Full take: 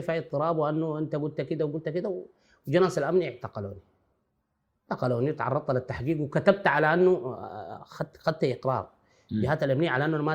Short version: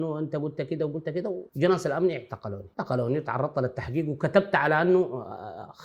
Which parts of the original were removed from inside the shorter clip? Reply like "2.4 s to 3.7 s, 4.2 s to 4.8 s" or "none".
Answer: 2.3 s to 2.6 s, 3.9 s to 4.9 s